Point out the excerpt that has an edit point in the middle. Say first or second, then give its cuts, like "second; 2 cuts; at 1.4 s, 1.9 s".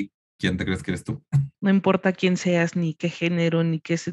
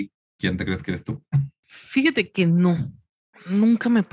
first; 1 cut; at 1.5 s